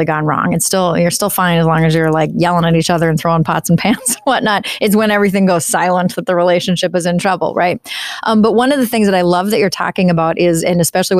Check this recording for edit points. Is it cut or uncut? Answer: uncut